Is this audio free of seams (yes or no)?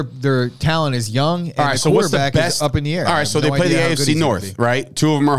yes